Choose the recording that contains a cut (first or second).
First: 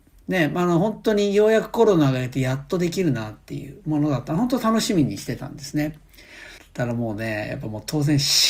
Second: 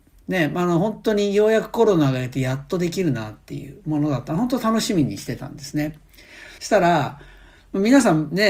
first